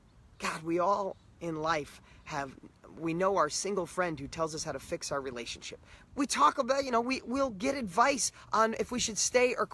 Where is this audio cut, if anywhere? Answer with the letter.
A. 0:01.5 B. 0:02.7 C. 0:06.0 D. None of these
C